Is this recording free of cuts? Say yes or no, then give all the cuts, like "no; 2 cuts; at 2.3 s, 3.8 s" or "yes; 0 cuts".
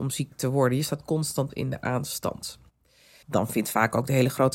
no; 1 cut; at 3.2 s